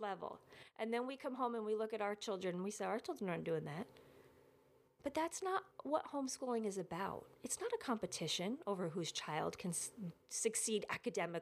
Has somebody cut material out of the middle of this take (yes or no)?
no